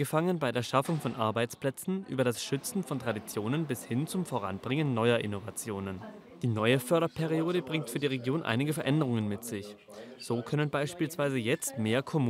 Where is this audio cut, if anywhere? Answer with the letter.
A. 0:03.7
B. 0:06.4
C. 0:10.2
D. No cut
D